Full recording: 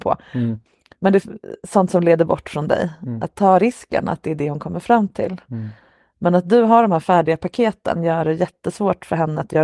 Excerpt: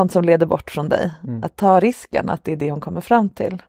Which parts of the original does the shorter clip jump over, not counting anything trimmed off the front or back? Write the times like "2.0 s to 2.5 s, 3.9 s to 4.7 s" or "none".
none